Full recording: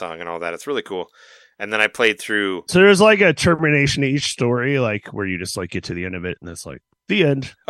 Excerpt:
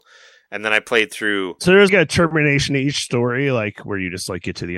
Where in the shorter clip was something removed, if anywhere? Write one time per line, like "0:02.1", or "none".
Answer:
0:01.9